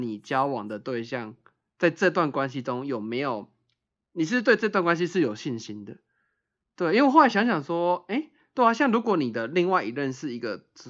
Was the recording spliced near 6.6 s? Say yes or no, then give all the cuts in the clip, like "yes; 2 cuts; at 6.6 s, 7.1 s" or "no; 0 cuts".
yes; 1 cut; at 6.6 s